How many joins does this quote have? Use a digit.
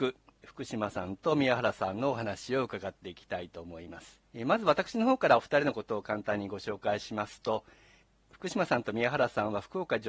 1